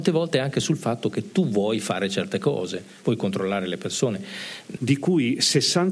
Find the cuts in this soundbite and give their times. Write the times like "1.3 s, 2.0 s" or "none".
4.8 s